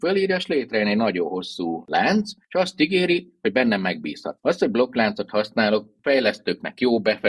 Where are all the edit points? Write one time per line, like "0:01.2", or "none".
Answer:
0:04.4